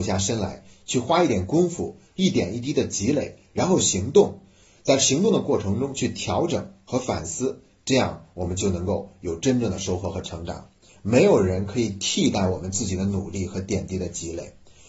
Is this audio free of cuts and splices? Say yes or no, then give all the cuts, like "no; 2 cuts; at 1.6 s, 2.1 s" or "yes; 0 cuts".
no; 1 cut; at 10.9 s